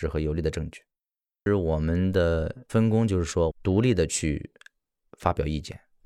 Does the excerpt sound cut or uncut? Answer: cut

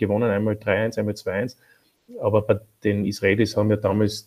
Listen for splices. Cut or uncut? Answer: uncut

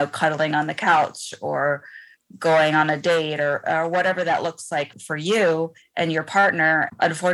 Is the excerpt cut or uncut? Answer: cut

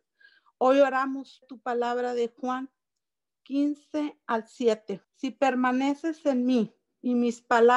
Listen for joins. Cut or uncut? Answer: cut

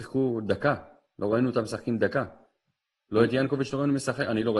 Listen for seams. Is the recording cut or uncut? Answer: uncut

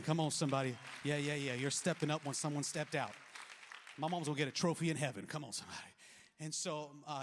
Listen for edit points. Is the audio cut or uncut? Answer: uncut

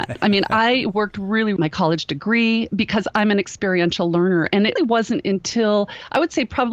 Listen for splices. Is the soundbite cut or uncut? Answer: cut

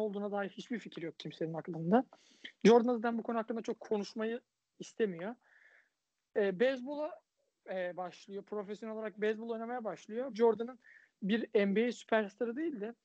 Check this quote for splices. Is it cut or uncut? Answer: cut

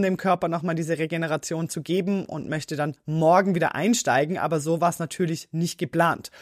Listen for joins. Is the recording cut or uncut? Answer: uncut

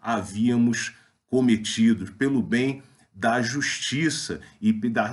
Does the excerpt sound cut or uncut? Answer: uncut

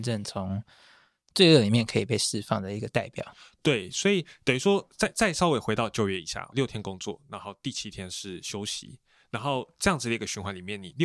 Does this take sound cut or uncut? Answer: cut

